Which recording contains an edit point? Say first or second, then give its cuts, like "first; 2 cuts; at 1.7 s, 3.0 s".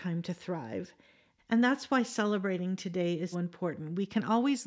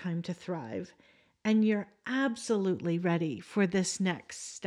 first; 2 cuts; at 1.4 s, 3.3 s